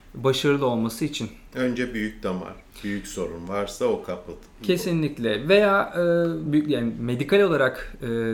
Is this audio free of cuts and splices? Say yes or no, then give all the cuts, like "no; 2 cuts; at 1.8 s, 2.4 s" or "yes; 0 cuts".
no; 1 cut; at 6.5 s